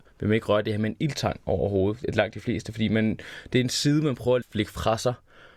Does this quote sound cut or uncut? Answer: cut